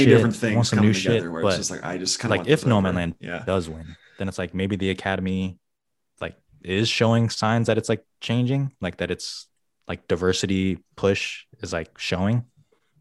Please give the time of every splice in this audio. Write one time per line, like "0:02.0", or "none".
none

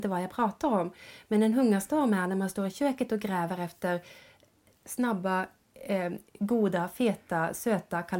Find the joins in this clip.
none

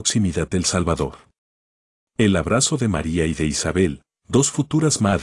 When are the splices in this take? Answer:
none

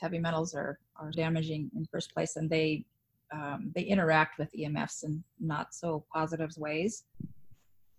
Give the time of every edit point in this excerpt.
0:01.1

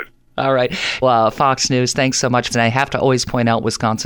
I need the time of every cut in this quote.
0:01.0
0:02.5

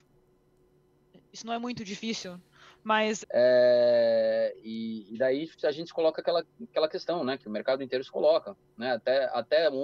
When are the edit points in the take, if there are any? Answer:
0:03.2

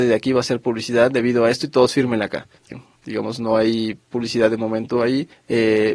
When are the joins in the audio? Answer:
0:02.7

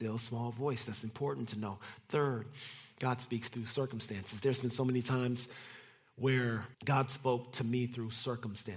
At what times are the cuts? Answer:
0:06.7

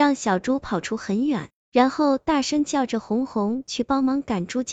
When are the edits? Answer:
none

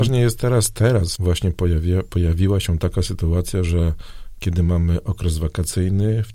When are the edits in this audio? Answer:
0:01.2

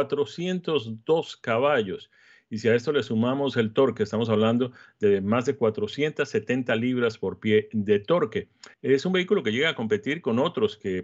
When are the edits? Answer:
0:08.7

